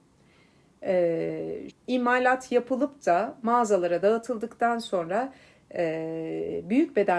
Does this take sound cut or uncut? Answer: cut